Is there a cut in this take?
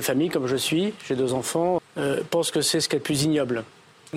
yes; 1 cut; at 1.8 s

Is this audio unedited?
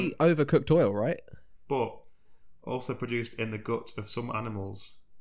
no; 1 cut; at 1.6 s

